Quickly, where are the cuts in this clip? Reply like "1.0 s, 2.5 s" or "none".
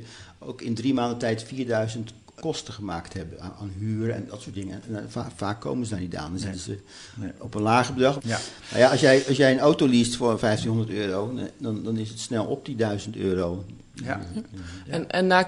2.4 s, 8.2 s